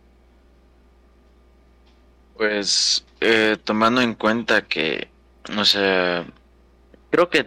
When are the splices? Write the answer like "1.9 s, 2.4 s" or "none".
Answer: none